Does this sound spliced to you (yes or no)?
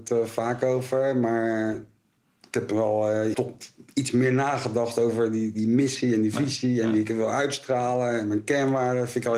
yes